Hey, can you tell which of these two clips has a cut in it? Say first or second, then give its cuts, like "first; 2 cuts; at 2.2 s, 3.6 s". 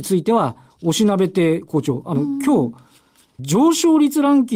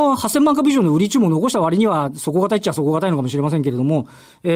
first; 1 cut; at 3.4 s